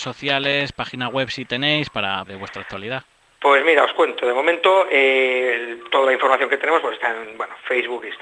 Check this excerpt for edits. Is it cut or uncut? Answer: cut